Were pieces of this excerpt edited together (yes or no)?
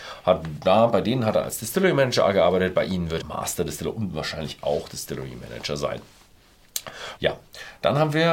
yes